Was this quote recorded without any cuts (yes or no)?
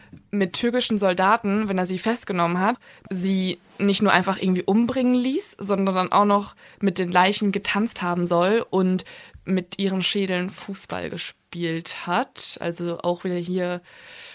yes